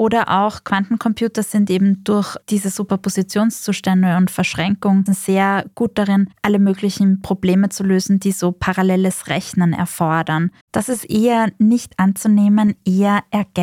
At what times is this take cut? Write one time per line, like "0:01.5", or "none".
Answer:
0:05.1
0:10.6